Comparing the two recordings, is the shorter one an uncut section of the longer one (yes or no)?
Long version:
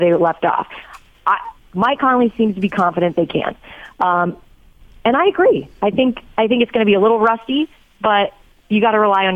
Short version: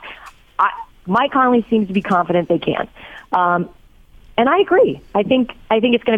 yes